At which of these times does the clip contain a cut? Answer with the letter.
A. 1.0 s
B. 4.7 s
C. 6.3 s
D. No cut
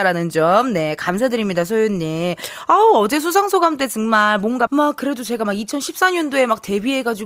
B